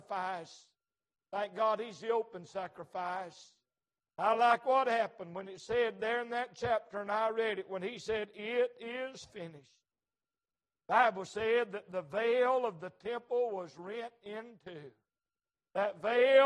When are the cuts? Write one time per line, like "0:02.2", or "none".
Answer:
none